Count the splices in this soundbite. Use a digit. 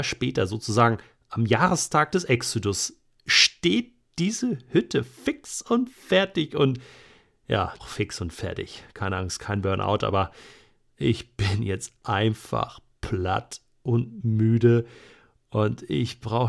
1